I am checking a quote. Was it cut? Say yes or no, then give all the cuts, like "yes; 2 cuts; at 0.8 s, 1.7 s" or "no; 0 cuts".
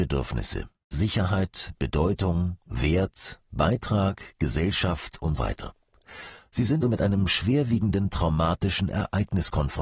yes; 2 cuts; at 5.4 s, 6.8 s